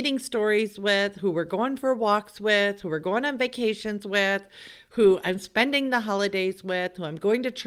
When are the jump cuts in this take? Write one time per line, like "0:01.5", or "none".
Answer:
none